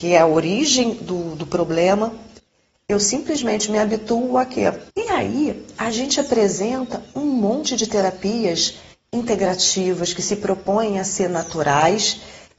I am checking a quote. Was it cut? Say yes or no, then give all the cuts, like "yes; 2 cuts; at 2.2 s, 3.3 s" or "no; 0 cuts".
yes; 1 cut; at 4.9 s